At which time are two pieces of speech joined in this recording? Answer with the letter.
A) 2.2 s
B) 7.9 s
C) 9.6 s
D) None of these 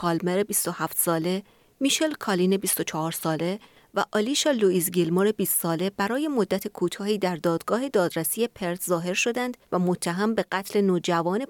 C